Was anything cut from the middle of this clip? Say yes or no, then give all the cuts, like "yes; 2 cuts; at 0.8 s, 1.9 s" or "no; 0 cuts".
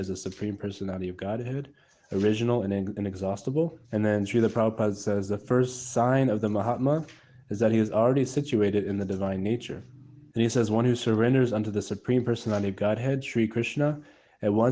yes; 2 cuts; at 3.8 s, 10.3 s